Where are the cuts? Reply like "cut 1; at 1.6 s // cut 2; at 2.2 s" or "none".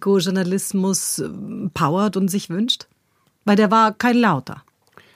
none

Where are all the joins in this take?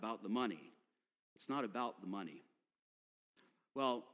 cut 1; at 1.2 s

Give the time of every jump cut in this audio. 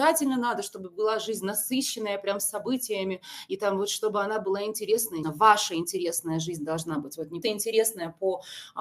cut 1; at 5.2 s // cut 2; at 7.4 s

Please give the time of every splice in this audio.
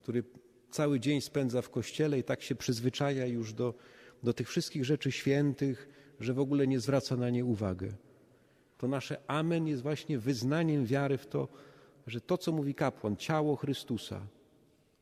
cut 1; at 8.7 s

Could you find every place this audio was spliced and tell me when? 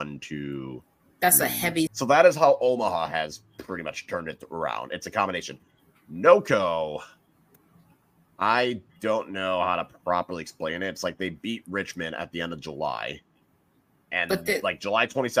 cut 1; at 1.9 s

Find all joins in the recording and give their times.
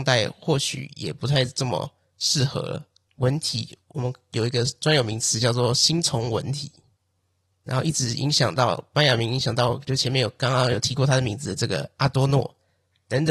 cut 1; at 3.1 s

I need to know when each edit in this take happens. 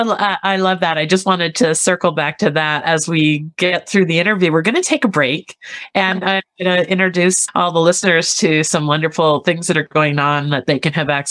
none

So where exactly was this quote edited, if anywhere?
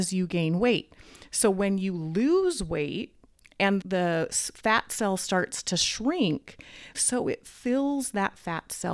cut 1; at 3.8 s // cut 2; at 6.9 s

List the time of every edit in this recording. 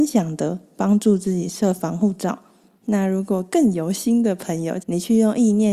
cut 1; at 2.8 s // cut 2; at 4.8 s

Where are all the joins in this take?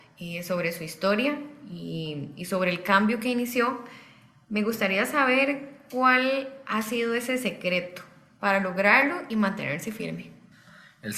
none

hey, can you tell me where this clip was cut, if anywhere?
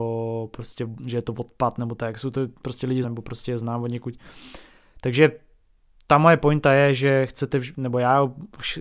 cut 1; at 3.0 s

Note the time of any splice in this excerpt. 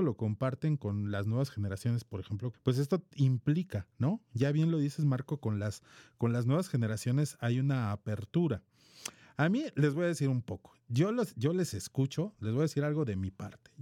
cut 1; at 2.5 s

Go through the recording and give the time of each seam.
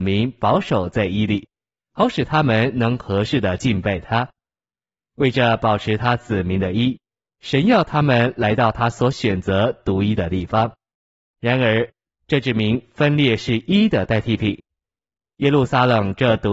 cut 1; at 12.1 s

